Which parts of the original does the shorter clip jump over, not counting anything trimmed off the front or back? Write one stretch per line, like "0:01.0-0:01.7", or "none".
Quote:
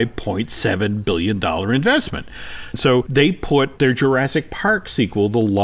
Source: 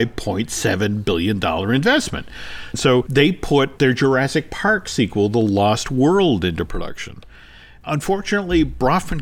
none